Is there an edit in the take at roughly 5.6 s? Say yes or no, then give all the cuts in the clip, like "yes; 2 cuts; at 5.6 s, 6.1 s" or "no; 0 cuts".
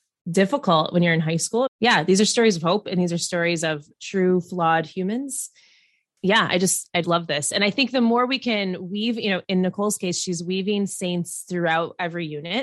no; 2 cuts; at 1.7 s, 7.0 s